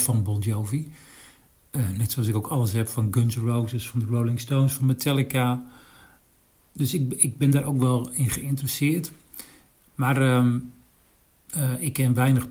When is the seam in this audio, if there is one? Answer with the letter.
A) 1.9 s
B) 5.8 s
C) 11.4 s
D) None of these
D